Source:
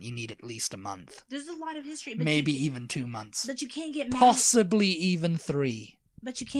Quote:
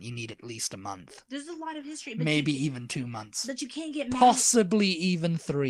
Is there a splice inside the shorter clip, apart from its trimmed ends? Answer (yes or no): no